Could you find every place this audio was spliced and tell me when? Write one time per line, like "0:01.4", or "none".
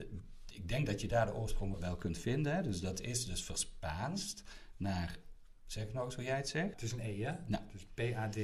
0:01.7
0:06.7